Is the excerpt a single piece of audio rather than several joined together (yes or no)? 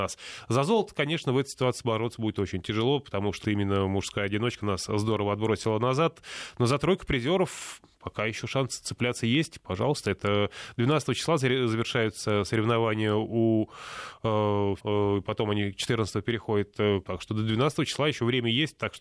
no